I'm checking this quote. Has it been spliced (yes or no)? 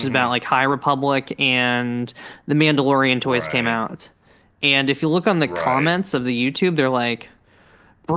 no